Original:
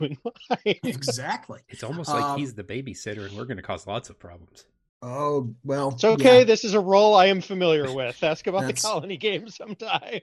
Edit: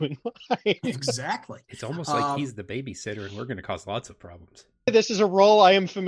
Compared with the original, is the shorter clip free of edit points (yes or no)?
no